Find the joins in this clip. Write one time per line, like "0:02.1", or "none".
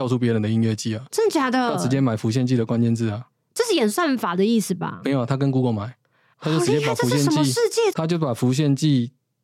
0:06.3
0:07.9